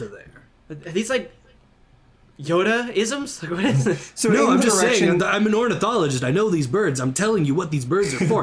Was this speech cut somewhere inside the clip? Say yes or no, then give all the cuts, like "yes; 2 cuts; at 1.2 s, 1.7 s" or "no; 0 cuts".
no; 0 cuts